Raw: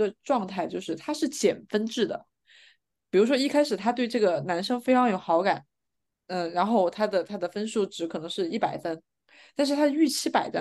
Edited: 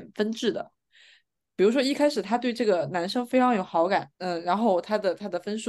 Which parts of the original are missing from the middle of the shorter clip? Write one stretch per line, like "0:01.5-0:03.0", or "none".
0:05.7-0:06.2